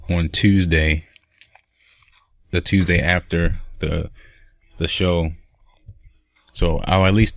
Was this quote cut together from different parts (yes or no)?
no